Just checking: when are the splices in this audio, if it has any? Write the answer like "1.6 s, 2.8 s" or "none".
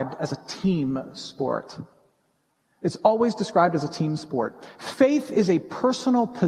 none